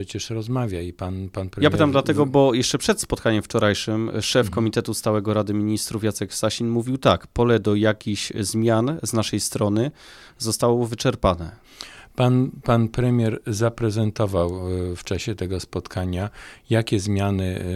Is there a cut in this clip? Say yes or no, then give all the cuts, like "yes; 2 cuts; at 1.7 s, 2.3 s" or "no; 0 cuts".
no; 0 cuts